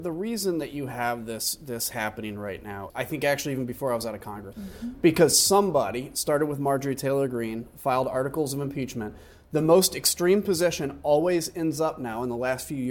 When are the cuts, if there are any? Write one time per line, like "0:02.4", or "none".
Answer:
0:02.9
0:04.5